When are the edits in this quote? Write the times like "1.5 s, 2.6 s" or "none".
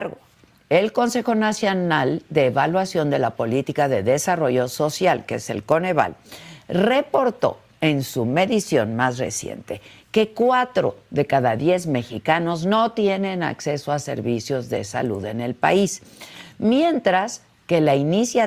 none